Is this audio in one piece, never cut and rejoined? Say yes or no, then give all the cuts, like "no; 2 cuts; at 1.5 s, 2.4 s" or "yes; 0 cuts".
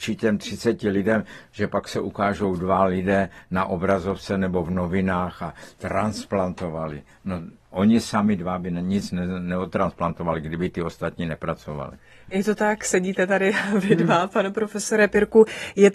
yes; 0 cuts